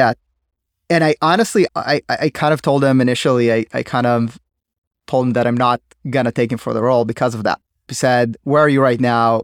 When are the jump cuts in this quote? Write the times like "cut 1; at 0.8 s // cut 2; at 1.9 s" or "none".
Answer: cut 1; at 1.7 s // cut 2; at 7.9 s

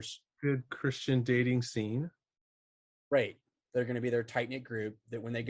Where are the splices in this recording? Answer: cut 1; at 3.6 s

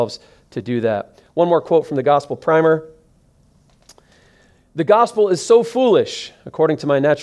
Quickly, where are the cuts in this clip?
none

